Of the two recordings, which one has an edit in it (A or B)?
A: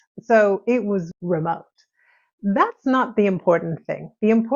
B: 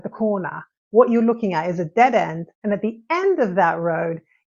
A